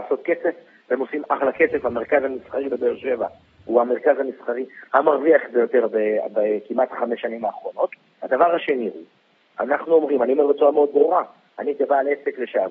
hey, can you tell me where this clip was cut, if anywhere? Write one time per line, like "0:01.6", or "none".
0:08.1